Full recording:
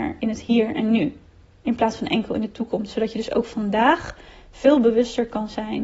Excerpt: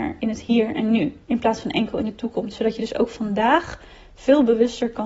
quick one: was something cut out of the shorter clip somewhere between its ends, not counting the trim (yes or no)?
yes